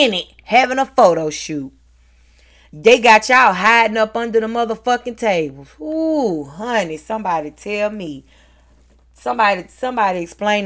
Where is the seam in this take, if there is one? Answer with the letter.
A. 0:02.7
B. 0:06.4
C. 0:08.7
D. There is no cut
D